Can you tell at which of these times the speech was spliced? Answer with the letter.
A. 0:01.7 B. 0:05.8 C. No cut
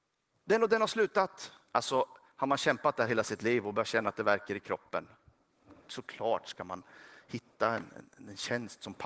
A